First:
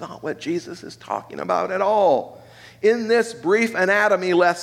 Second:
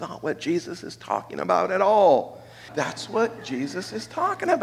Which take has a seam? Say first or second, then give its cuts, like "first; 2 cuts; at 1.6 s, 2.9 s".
second; 1 cut; at 2.7 s